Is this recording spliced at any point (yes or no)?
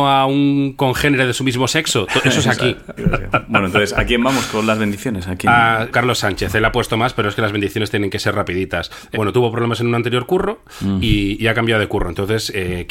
yes